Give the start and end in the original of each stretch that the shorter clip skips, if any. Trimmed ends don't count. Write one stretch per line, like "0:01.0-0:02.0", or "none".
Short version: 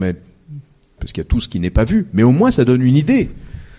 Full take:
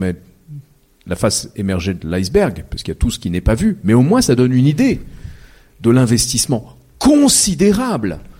0:01.0-0:02.7

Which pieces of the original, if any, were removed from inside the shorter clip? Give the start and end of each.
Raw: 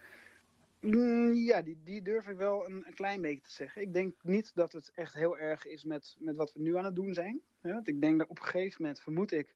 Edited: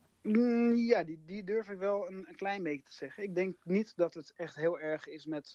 none

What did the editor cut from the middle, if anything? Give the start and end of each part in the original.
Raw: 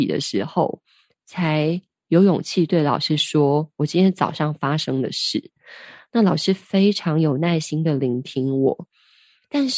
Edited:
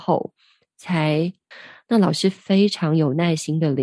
0:02.0-0:05.7

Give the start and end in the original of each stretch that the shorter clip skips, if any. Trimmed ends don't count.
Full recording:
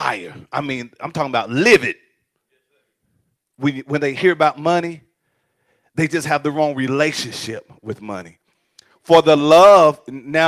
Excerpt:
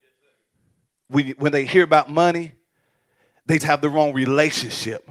0:06.1-0:06.2

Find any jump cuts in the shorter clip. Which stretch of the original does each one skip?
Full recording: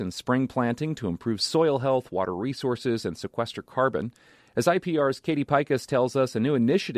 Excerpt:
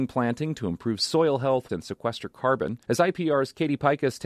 0:02.1-0:03.0
0:04.2-0:04.5

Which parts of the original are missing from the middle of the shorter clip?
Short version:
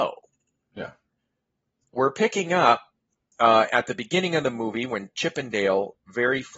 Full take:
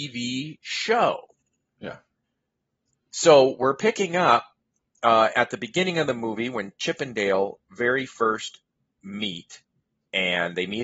0:03.0-0:03.6

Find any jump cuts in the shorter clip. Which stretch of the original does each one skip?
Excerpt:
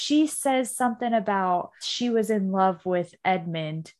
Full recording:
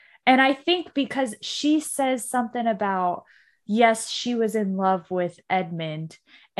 0:03.3-0:04.1

